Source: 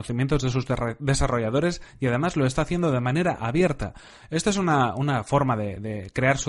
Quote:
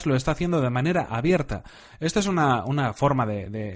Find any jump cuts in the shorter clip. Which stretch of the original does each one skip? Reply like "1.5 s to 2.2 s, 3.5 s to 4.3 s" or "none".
none